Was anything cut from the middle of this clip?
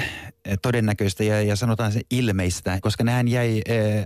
yes; 1 cut; at 2.8 s

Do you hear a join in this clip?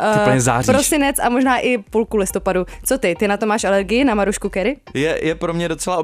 yes; 1 cut; at 4.9 s

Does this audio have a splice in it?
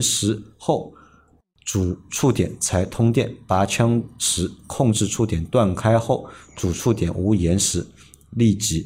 no; 0 cuts

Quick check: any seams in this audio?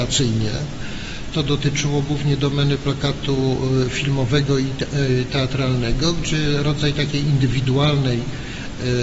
no; 0 cuts

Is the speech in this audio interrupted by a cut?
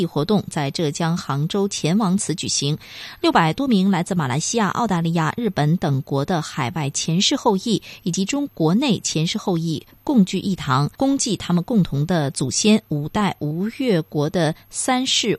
yes; 2 cuts; at 8.5 s, 10.9 s

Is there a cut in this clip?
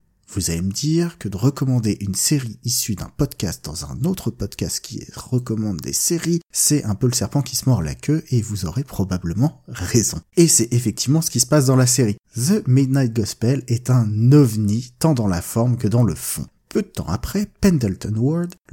yes; 3 cuts; at 10.3 s, 12.2 s, 16.5 s

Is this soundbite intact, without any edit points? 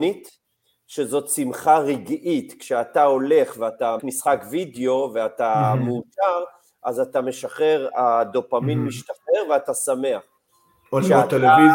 no; 1 cut; at 4.0 s

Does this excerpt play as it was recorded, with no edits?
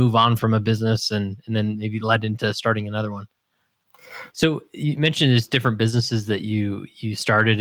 no; 1 cut; at 4.3 s

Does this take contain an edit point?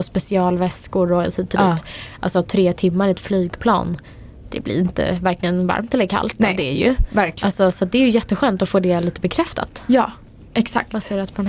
no; 0 cuts

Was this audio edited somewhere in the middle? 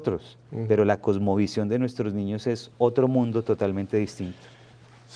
yes; 1 cut; at 2.7 s

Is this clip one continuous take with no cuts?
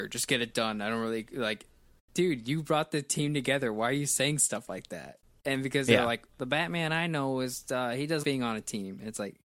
no; 2 cuts; at 6.3 s, 8.2 s

